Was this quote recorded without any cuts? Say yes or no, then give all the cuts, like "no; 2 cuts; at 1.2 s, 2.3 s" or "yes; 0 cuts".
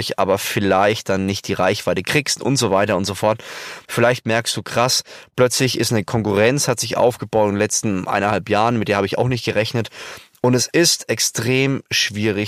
no; 1 cut; at 3.8 s